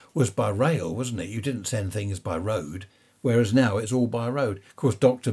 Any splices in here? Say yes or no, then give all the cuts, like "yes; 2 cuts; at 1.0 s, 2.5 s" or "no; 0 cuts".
no; 0 cuts